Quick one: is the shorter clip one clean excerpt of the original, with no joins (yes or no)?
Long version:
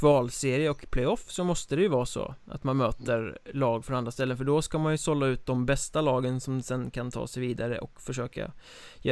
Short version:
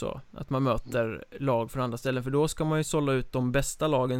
yes